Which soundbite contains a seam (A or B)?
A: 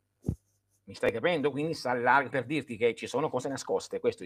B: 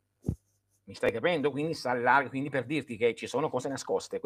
A